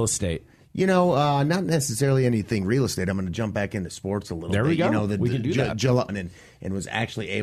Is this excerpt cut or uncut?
cut